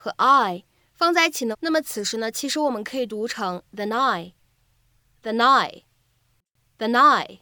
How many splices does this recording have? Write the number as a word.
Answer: one